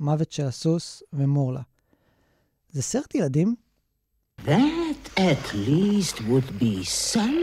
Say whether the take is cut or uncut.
cut